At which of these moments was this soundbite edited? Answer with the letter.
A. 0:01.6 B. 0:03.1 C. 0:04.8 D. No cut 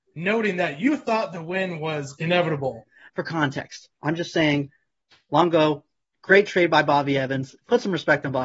B